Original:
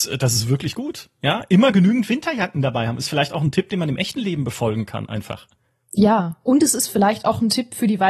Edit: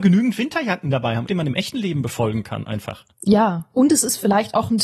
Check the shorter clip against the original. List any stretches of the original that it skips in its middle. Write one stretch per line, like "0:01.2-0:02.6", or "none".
0:03.0-0:03.7
0:05.5-0:05.8